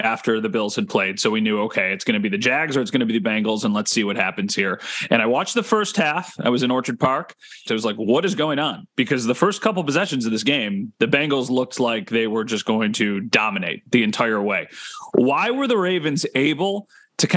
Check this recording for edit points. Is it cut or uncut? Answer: cut